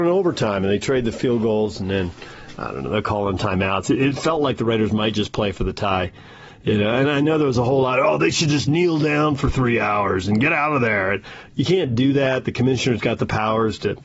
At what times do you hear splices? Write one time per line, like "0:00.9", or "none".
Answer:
none